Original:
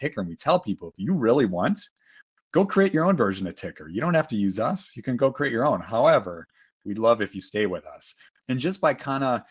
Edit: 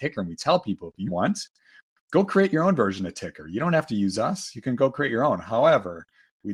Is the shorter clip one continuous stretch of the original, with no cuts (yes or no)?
no